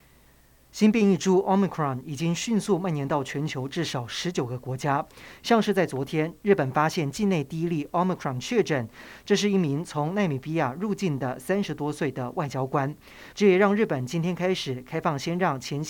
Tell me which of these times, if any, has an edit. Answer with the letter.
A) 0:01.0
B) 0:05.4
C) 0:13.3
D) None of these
C